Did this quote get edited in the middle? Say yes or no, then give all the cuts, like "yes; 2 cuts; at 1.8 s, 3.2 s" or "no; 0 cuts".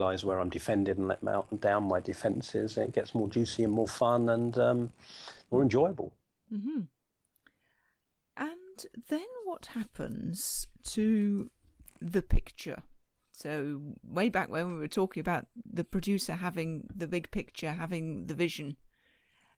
no; 0 cuts